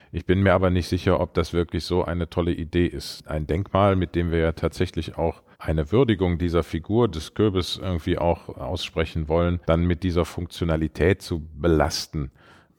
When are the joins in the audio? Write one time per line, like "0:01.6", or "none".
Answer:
0:05.5
0:09.6